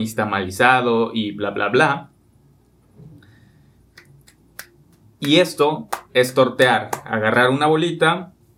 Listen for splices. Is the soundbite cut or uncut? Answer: uncut